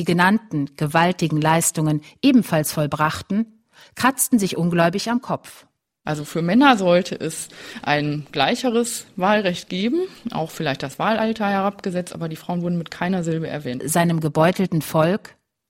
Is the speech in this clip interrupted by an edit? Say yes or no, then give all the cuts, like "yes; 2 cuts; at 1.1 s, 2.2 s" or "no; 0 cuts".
yes; 1 cut; at 13.8 s